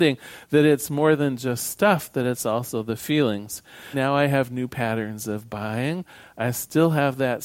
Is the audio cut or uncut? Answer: cut